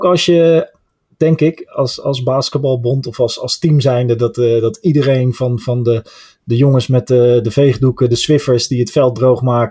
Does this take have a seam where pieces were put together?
no; 0 cuts

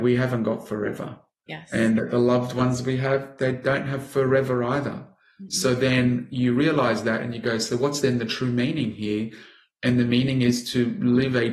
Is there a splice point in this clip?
no; 0 cuts

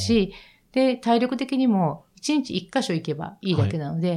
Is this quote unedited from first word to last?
yes; 0 cuts

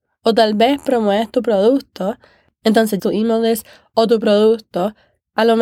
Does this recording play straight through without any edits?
no; 1 cut; at 3.0 s

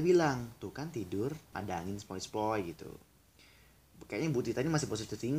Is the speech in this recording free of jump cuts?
no; 1 cut; at 1.5 s

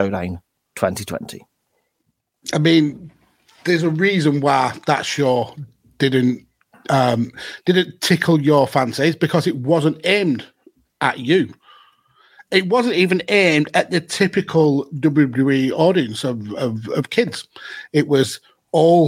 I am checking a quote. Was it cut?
no; 0 cuts

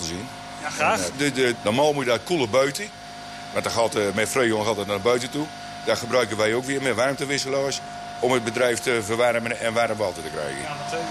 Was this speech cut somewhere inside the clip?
yes; 1 cut; at 1.6 s

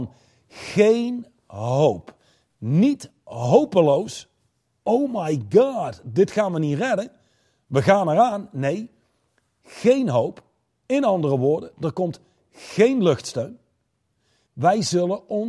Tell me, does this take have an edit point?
yes; 1 cut; at 14.5 s

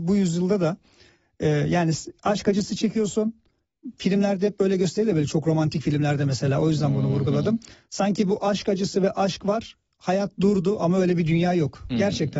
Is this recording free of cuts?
yes; 0 cuts

